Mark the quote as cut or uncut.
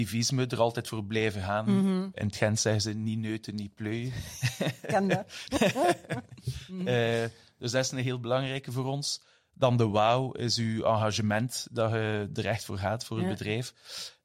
uncut